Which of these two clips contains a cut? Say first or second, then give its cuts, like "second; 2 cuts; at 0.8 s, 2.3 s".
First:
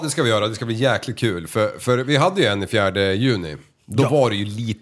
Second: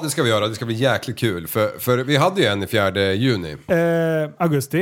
second; 1 cut; at 3.7 s